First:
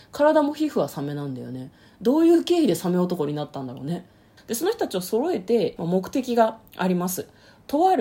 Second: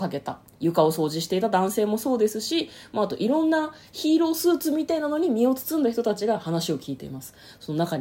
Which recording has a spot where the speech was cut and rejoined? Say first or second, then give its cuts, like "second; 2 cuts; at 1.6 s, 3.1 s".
first; 2 cuts; at 4.4 s, 5.8 s